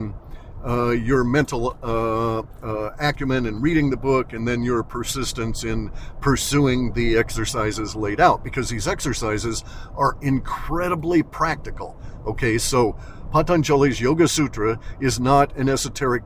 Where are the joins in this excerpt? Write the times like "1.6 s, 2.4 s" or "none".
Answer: none